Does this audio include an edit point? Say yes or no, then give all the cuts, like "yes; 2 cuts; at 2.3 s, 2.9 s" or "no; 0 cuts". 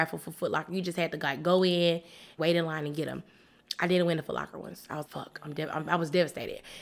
yes; 2 cuts; at 2.4 s, 5.1 s